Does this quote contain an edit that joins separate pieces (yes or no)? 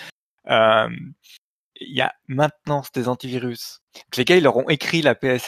yes